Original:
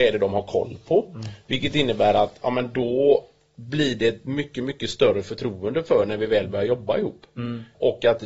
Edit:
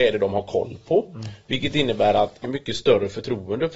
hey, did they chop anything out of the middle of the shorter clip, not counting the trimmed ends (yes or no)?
yes